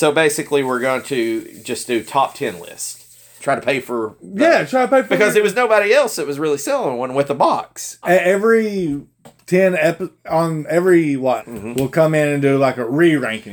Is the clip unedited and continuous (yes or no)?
no